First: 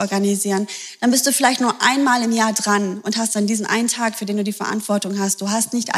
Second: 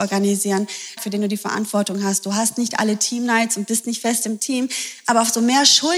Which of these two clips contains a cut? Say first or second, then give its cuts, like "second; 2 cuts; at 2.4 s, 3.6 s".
second; 1 cut; at 1.0 s